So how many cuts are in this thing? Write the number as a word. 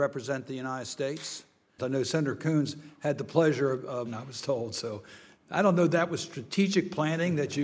two